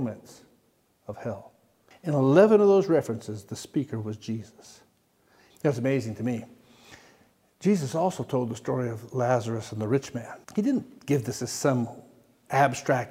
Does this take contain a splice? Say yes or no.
yes